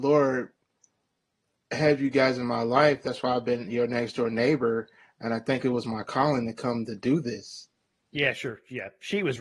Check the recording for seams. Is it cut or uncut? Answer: uncut